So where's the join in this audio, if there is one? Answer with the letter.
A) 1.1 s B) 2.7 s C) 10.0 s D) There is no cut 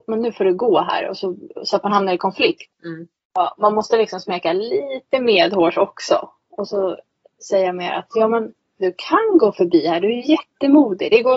B